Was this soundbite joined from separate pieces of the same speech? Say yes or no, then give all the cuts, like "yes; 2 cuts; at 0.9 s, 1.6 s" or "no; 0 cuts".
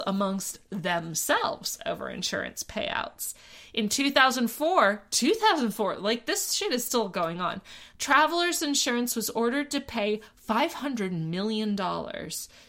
no; 0 cuts